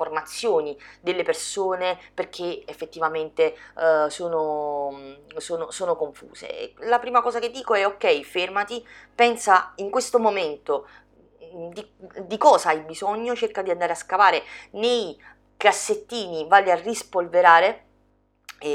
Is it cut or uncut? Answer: uncut